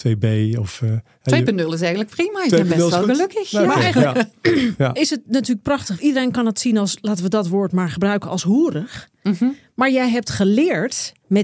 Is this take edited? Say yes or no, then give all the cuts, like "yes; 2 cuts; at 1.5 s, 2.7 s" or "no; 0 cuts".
yes; 1 cut; at 6.0 s